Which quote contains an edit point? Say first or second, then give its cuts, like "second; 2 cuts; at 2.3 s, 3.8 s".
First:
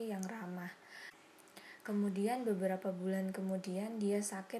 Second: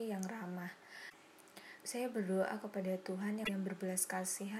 second; 1 cut; at 1.8 s